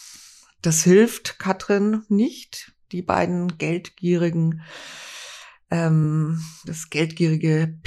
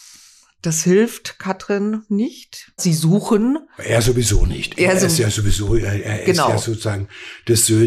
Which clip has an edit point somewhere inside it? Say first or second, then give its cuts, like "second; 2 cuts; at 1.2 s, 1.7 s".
second; 1 cut; at 2.8 s